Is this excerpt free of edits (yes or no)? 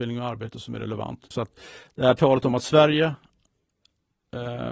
no